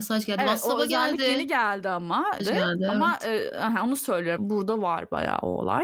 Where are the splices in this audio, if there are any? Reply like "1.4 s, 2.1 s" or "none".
2.4 s, 4.4 s

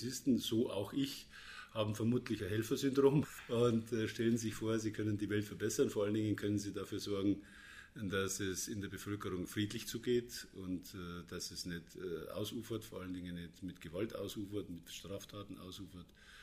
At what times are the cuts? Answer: none

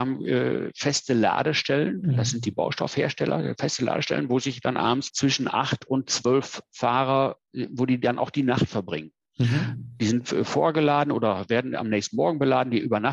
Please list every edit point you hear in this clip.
5.1 s

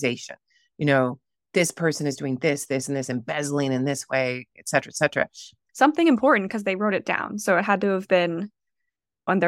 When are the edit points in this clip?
5.7 s

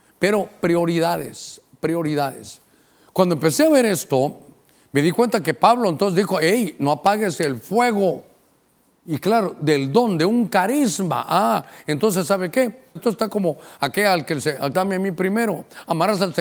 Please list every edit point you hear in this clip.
13.0 s, 14.7 s

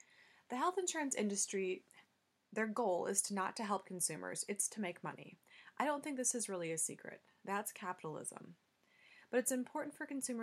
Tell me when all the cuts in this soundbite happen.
none

